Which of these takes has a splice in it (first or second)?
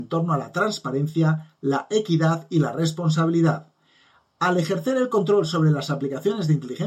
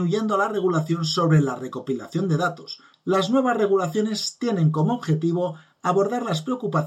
second